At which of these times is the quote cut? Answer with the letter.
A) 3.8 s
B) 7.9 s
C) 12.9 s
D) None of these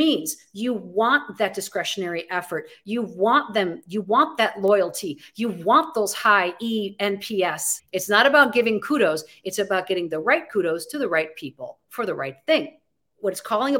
B